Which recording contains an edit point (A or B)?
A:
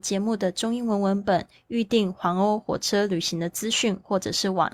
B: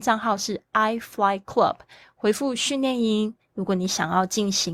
B